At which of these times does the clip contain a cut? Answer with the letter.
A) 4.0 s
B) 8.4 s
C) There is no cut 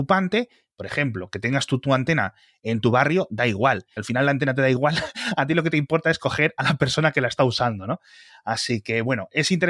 A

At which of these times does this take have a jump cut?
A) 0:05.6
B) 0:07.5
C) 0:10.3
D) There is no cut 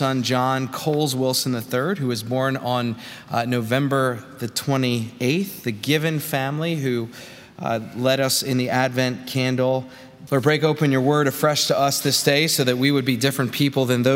C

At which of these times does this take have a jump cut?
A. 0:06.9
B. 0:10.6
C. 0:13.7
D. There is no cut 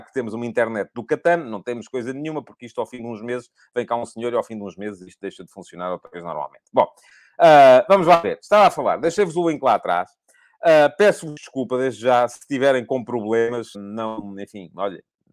C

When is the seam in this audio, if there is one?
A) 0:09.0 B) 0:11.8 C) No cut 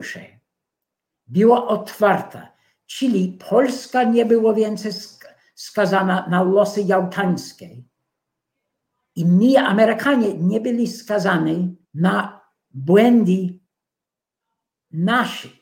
B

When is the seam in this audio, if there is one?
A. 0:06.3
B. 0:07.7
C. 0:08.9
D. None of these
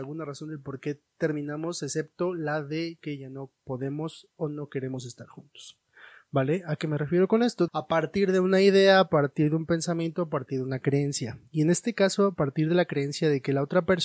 B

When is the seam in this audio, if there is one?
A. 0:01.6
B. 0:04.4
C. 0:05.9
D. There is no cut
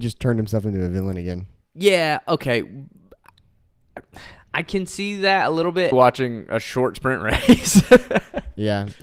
C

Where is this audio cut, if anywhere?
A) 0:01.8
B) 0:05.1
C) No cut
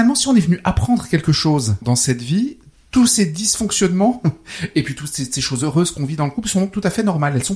A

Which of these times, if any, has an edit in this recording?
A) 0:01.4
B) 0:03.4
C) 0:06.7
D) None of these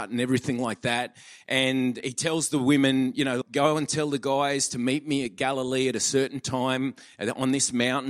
B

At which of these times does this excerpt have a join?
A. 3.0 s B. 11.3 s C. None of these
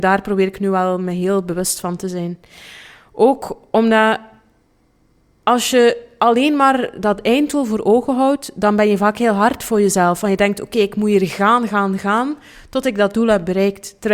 C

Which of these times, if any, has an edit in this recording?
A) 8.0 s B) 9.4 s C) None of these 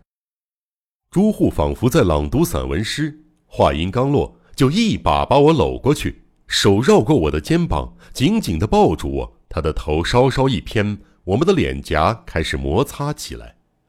B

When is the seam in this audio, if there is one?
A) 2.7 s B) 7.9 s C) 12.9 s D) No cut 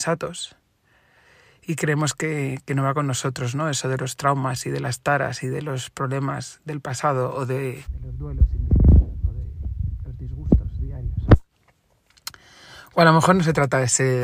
B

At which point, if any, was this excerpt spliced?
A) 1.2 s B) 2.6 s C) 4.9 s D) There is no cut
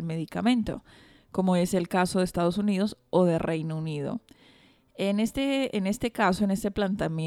D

